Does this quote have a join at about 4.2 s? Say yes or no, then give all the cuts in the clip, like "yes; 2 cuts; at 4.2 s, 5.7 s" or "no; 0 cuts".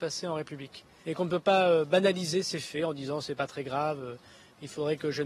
no; 1 cut; at 1.0 s